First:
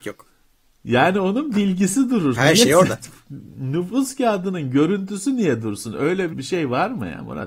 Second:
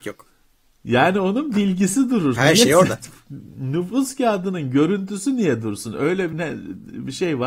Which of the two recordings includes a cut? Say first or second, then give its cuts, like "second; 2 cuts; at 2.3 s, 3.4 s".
first; 1 cut; at 6.3 s